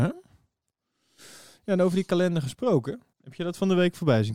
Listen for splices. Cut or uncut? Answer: cut